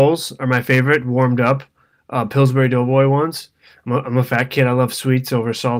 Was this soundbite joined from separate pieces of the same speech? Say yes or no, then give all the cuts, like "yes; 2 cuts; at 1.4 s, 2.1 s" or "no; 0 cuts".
no; 0 cuts